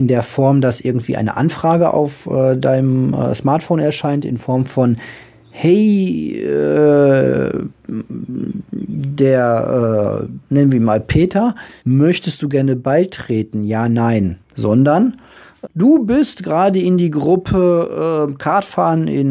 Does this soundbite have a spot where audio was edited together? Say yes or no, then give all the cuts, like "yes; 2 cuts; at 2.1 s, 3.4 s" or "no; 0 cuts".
yes; 3 cuts; at 11.8 s, 14.4 s, 15.7 s